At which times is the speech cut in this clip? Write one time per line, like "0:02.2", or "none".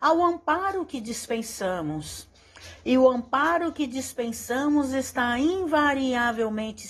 none